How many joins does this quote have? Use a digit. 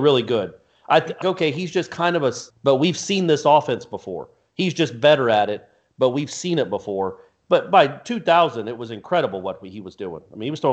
2